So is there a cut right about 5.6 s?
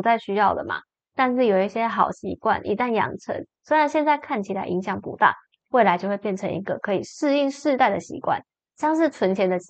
yes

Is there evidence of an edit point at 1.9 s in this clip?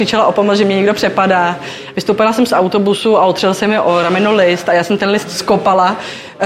yes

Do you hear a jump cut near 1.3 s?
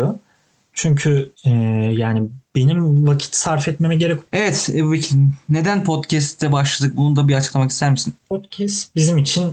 yes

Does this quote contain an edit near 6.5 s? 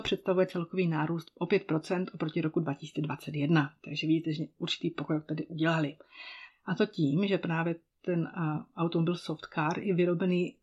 yes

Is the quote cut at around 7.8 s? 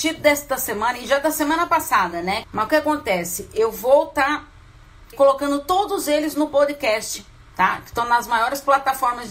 no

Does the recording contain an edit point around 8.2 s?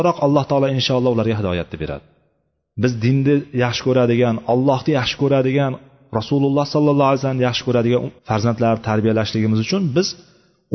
yes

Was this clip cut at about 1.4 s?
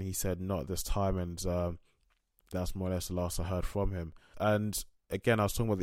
no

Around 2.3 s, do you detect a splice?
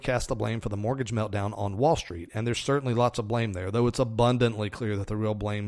no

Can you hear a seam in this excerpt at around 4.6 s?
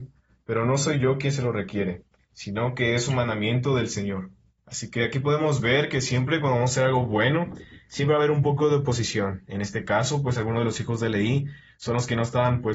yes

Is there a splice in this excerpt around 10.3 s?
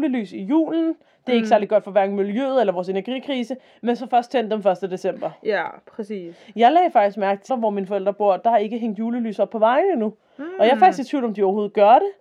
no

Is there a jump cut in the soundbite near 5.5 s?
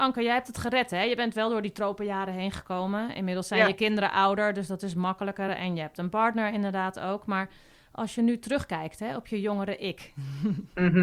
no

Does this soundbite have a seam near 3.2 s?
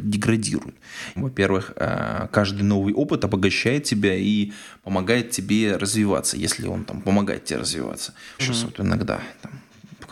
no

